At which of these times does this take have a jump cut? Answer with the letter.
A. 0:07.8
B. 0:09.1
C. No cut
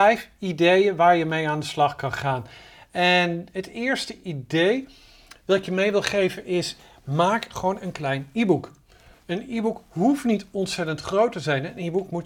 A